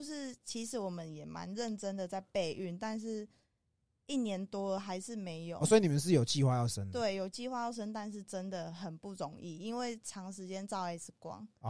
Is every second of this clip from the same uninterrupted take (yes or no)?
yes